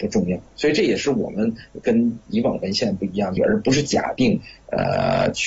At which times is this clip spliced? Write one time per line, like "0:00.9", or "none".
0:03.4